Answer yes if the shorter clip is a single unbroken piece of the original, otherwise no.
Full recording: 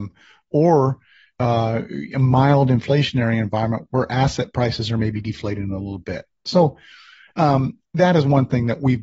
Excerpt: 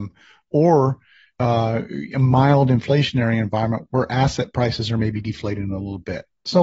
yes